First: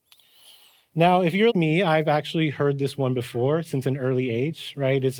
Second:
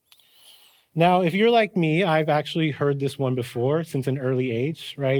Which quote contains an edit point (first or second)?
first